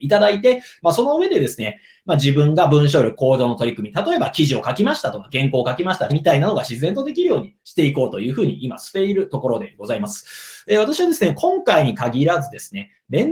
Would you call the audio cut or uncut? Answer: cut